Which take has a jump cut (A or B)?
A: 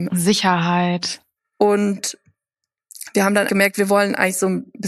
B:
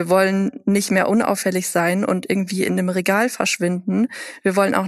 A